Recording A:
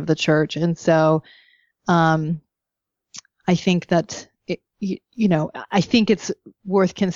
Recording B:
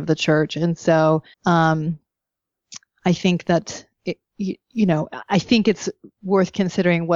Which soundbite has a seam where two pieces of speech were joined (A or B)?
B